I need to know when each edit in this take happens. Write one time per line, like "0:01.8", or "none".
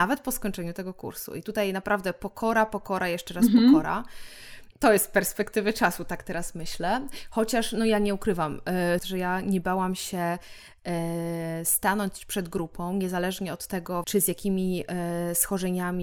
0:09.0
0:14.0